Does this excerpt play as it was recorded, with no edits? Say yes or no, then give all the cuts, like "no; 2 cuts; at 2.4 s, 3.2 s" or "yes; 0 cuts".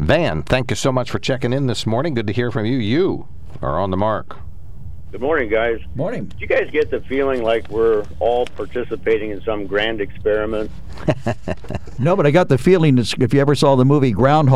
yes; 0 cuts